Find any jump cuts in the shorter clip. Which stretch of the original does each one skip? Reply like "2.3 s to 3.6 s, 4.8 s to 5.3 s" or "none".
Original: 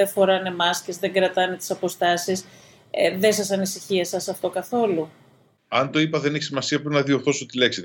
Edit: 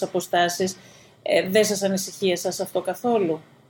none